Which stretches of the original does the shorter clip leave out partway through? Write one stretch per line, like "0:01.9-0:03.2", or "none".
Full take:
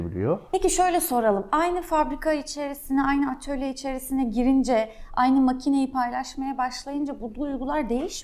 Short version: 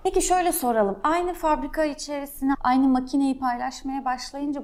0:03.0-0:05.1